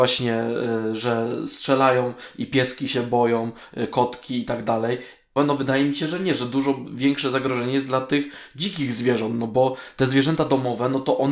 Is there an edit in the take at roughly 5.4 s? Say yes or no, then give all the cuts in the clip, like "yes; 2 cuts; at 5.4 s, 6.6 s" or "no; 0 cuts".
yes; 1 cut; at 5.4 s